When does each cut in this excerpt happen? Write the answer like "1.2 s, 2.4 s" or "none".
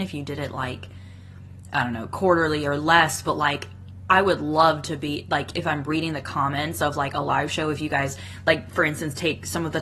5.5 s